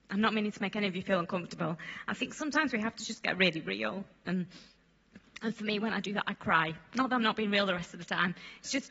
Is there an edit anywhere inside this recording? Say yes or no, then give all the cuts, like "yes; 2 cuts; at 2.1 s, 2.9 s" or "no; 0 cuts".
no; 0 cuts